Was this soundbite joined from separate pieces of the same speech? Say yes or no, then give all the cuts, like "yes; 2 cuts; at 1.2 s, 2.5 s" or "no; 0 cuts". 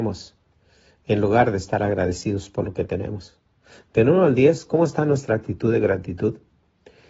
no; 0 cuts